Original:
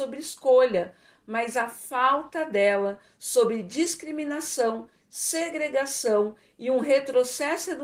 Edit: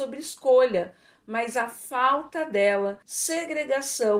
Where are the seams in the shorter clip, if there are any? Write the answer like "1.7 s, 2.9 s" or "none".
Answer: 3.0 s